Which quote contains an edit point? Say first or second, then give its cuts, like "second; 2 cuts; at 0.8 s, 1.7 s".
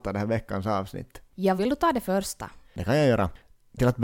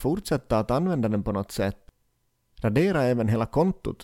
first; 1 cut; at 1.6 s